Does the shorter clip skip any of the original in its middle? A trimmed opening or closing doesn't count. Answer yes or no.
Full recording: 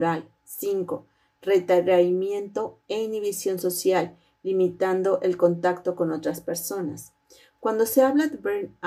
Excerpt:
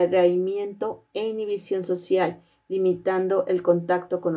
no